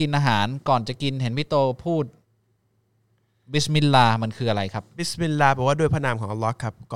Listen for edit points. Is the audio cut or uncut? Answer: uncut